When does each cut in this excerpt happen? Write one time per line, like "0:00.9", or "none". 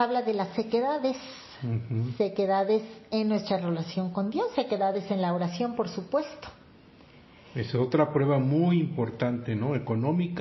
none